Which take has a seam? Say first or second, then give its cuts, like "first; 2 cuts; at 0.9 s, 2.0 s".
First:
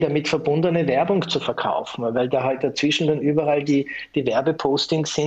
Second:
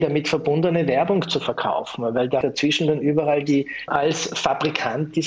second; 2 cuts; at 2.4 s, 3.9 s